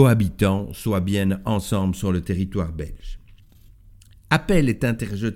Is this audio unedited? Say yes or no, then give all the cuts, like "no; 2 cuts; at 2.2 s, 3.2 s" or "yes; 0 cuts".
yes; 0 cuts